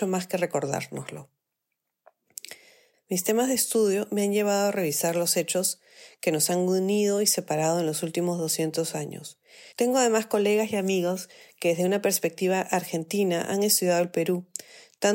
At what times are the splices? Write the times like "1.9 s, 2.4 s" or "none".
2.9 s, 9.7 s